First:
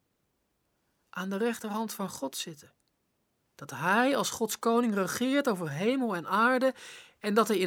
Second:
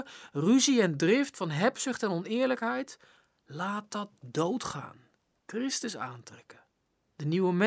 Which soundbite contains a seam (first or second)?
second